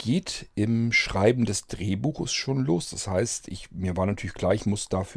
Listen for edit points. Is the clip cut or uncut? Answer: uncut